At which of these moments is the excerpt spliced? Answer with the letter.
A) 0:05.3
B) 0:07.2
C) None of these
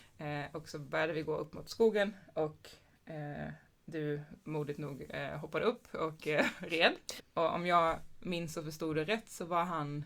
B